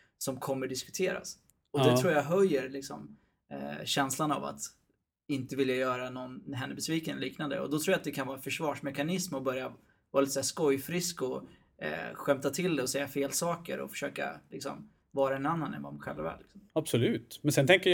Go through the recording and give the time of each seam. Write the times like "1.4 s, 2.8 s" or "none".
16.7 s